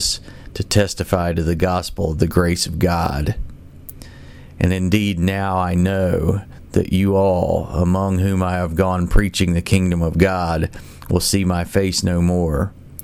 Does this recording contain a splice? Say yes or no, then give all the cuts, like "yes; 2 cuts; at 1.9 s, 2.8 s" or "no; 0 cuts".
no; 0 cuts